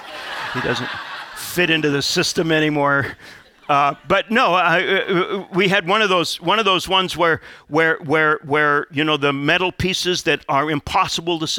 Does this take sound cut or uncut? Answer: uncut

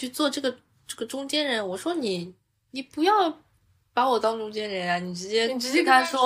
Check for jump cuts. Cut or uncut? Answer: uncut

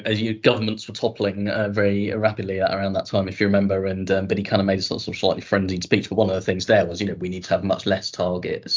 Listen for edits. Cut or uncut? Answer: uncut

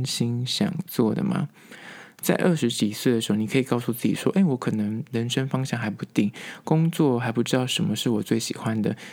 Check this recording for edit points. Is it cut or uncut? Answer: uncut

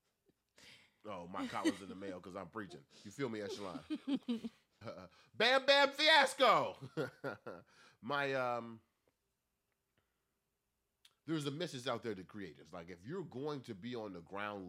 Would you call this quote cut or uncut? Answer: cut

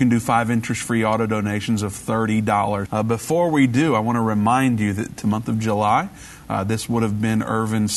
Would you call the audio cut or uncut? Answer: cut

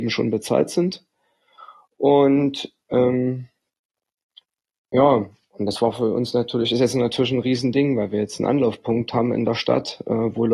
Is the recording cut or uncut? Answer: uncut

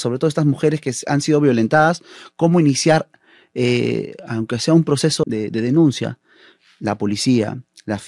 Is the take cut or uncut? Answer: cut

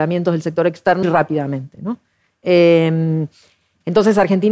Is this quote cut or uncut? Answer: cut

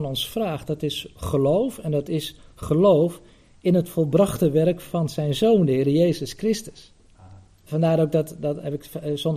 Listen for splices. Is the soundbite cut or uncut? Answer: cut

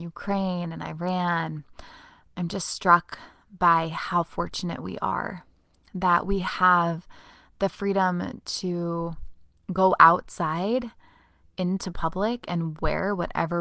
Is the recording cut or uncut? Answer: uncut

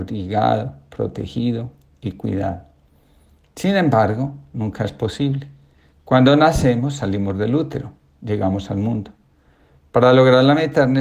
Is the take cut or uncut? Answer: cut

